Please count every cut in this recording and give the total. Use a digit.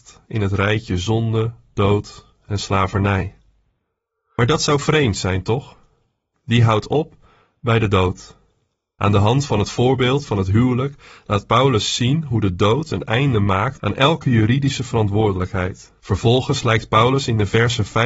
2